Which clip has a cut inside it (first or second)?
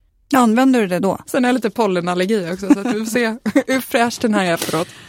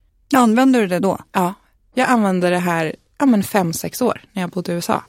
first